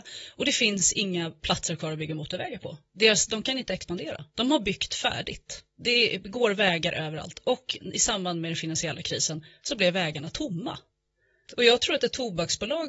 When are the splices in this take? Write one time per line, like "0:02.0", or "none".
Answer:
0:11.5